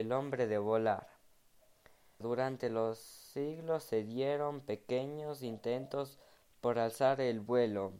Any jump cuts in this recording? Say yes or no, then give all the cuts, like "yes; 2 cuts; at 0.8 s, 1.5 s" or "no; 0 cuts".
yes; 1 cut; at 2.2 s